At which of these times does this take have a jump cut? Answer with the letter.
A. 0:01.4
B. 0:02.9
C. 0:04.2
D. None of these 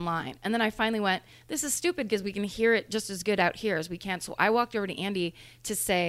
D